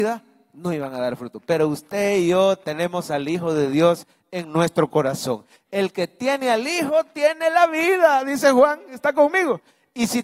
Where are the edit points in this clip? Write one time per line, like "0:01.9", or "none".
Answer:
none